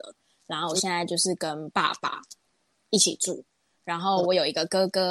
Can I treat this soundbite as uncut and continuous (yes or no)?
yes